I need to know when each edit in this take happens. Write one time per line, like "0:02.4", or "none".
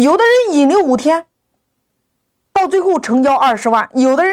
none

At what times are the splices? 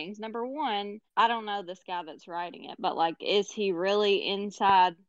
0:01.1

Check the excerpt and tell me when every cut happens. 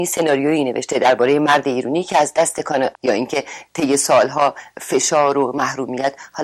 0:02.9

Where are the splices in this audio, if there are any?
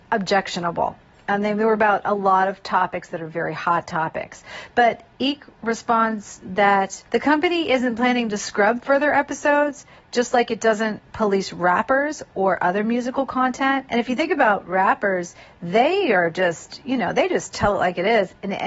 0:07.1

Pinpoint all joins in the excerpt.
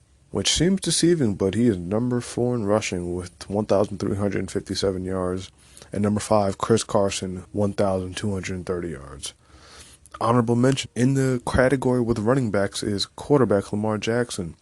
0:07.4
0:10.8

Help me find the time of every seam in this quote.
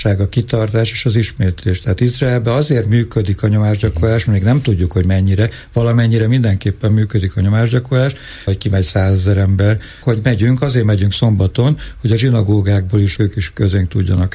0:08.5
0:10.0
0:13.2

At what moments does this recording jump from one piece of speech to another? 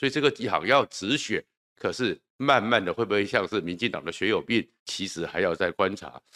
0:01.7
0:04.8

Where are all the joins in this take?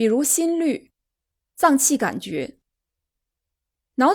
0:01.4

